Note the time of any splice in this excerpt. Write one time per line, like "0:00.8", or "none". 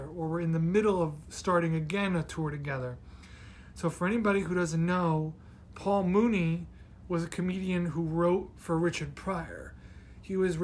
none